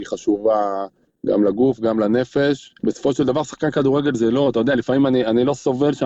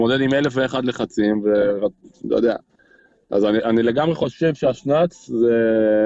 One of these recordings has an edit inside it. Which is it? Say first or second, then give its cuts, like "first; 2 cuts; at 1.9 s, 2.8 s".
first; 1 cut; at 2.8 s